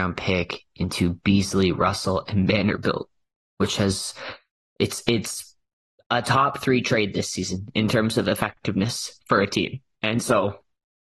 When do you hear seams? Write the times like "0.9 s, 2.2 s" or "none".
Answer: none